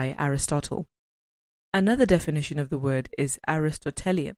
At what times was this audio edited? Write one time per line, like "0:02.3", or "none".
0:01.6